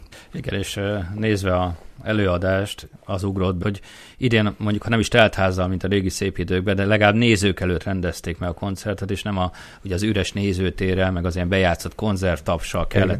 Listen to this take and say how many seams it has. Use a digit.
1